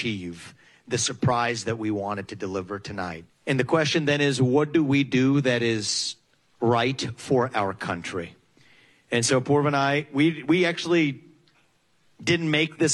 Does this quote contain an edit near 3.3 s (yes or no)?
yes